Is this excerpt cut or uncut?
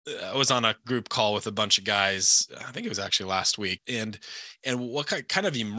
cut